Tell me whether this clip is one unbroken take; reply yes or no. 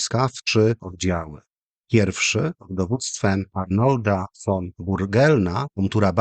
yes